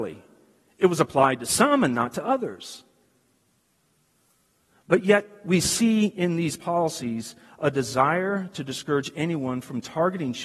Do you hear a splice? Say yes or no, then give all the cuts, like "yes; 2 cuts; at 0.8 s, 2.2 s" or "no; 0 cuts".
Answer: no; 0 cuts